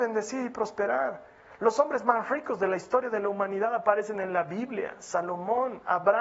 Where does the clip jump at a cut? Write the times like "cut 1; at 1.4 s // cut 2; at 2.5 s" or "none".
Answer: none

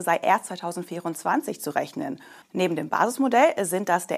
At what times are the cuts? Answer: cut 1; at 2.4 s

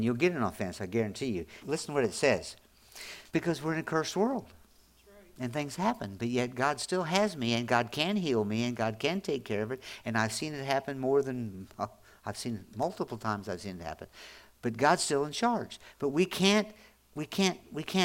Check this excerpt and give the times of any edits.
cut 1; at 1.6 s // cut 2; at 3.3 s

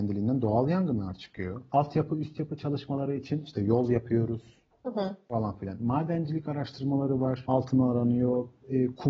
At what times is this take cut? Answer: none

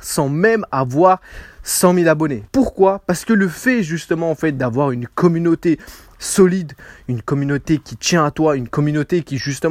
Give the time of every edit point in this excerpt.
cut 1; at 2.5 s

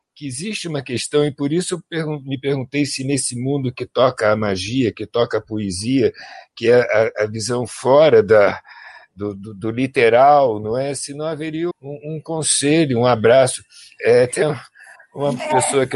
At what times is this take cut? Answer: cut 1; at 11.7 s

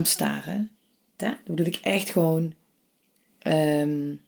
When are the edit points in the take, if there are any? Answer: cut 1; at 1.2 s

